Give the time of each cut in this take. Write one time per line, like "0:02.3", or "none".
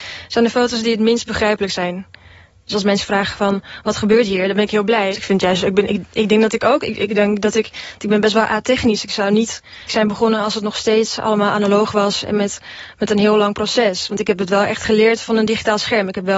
0:05.1
0:09.9